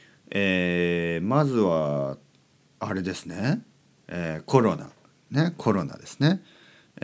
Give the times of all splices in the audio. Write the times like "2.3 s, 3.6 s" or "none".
4.0 s